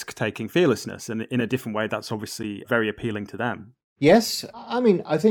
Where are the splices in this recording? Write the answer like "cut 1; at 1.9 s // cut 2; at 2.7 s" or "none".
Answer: none